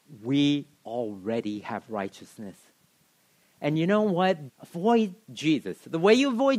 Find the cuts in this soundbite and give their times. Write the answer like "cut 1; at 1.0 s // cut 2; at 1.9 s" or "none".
cut 1; at 4.5 s